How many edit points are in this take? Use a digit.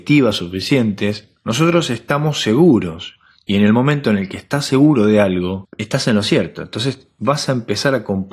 1